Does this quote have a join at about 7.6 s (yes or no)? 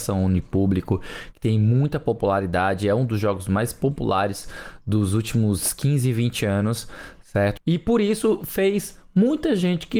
yes